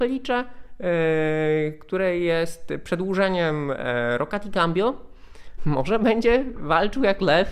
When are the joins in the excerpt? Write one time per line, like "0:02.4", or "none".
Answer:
0:05.6